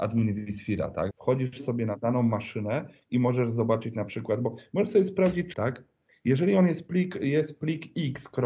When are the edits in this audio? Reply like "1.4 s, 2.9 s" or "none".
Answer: 1.1 s, 5.5 s